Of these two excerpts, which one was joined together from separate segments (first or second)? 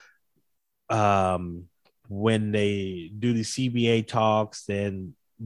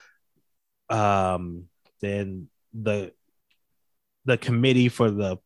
second